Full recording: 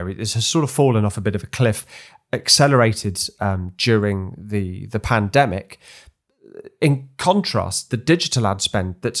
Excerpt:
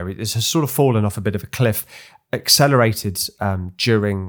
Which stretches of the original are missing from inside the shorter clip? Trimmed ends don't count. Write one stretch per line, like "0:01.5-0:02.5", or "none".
none